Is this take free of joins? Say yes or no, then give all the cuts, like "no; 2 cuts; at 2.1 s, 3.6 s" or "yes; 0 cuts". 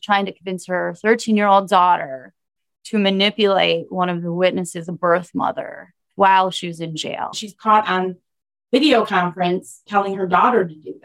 yes; 0 cuts